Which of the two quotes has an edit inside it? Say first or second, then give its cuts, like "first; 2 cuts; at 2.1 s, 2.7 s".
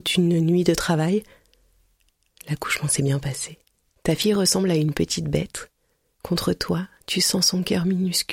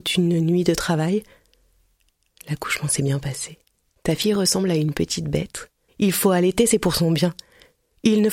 second; 1 cut; at 5.9 s